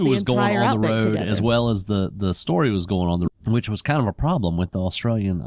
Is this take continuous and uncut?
no; 1 cut; at 3.3 s

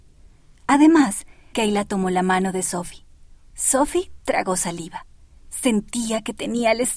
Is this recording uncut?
no; 2 cuts; at 1.5 s, 3.5 s

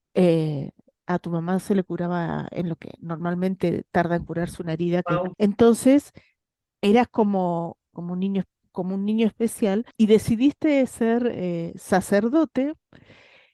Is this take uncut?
no; 3 cuts; at 5.3 s, 7.9 s, 9.9 s

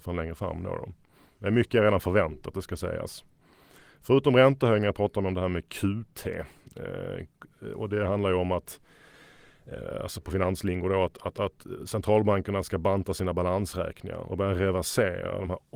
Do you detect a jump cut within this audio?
no; 0 cuts

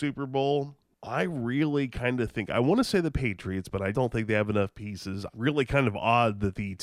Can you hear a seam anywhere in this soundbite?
yes; 2 cuts; at 3.9 s, 5.3 s

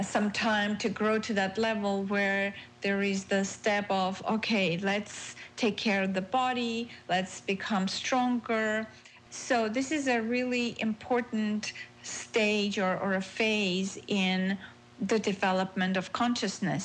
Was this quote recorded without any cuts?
no; 1 cut; at 9.3 s

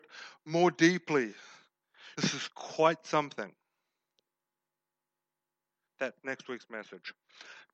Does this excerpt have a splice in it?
yes; 2 cuts; at 2.1 s, 5.9 s

